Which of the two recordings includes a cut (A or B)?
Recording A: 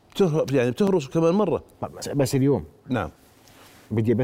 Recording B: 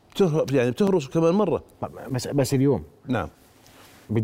A